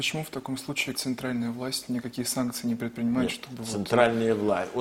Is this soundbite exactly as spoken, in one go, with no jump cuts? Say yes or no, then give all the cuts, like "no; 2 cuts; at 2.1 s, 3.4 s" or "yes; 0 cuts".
no; 1 cut; at 0.9 s